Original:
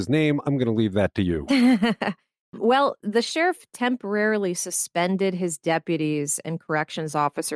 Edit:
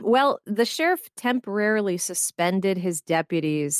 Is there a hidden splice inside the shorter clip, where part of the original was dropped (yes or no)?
no